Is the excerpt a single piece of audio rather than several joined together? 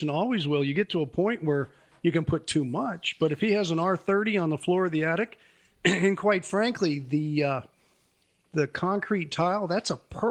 yes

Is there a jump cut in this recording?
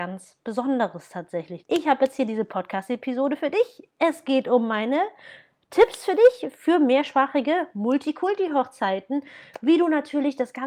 yes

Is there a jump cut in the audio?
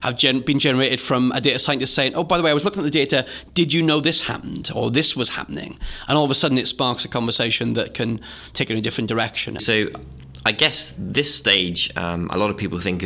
yes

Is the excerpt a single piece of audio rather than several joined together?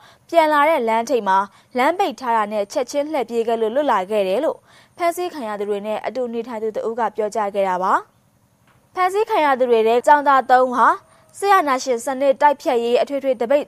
no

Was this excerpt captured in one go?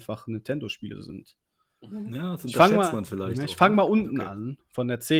yes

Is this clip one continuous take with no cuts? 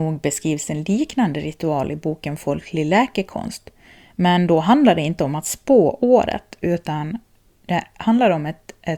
yes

